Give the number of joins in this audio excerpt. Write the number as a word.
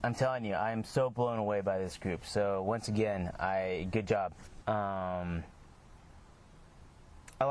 one